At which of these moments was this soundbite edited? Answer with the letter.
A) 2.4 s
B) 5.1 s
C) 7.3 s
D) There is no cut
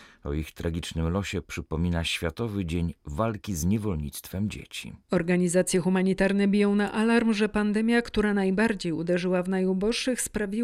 D